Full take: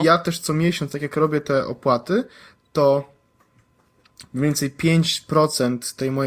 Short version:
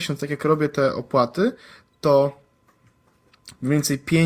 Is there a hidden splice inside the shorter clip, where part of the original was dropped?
no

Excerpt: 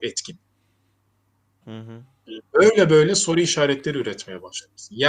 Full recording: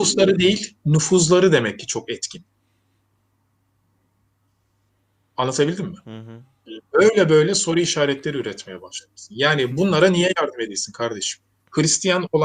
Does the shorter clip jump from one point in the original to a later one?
yes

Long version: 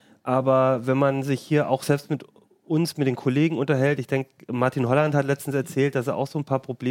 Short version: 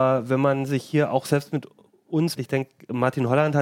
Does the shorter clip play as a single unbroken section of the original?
no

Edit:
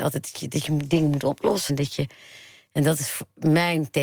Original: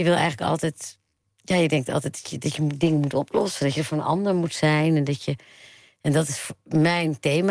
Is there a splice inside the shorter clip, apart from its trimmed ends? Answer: yes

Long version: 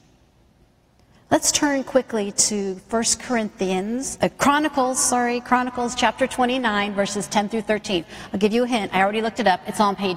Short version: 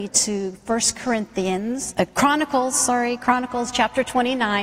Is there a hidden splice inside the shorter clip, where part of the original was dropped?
no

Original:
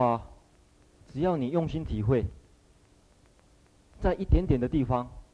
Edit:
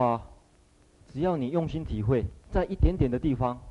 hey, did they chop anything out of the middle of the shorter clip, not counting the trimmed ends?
yes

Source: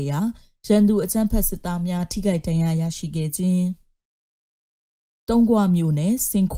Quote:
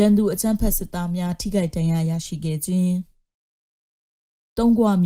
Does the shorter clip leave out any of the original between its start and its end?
no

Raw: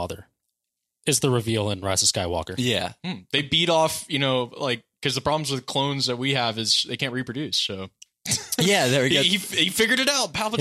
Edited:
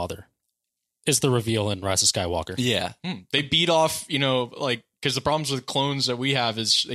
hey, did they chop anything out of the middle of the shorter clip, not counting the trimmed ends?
no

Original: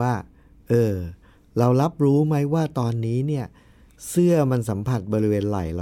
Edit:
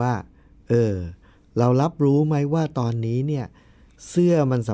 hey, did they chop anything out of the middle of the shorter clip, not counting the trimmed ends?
no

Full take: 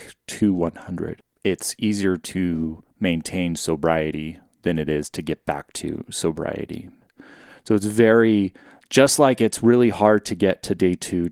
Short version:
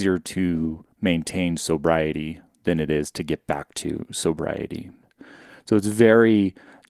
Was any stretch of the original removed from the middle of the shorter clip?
no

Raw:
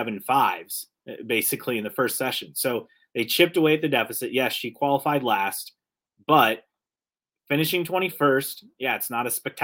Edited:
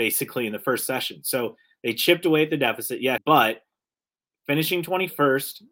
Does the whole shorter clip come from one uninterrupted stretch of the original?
no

